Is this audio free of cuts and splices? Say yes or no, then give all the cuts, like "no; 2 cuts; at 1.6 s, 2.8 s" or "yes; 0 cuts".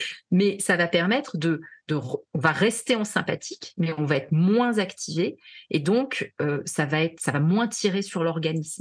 yes; 0 cuts